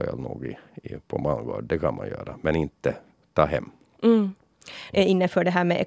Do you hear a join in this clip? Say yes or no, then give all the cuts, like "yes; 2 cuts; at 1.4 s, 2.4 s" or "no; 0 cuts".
yes; 1 cut; at 4.9 s